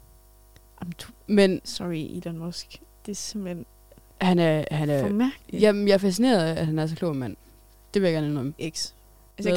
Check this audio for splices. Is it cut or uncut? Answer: cut